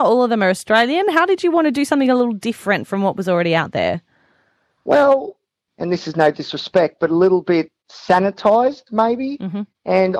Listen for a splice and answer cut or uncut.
cut